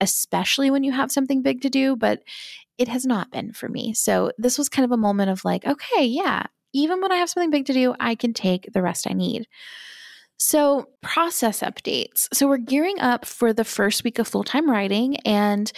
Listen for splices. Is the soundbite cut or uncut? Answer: uncut